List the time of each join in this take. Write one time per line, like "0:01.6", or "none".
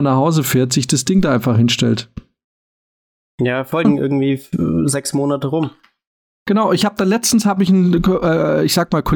0:03.8